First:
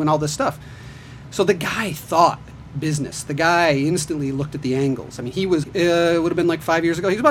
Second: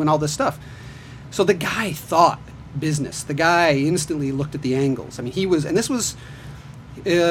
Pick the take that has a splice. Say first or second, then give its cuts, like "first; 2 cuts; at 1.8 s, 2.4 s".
first; 1 cut; at 5.6 s